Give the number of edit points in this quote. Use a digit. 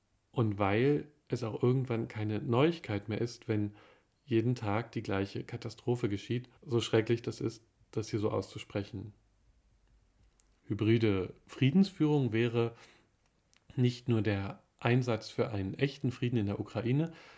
2